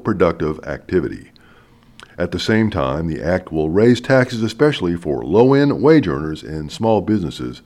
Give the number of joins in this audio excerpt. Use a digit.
0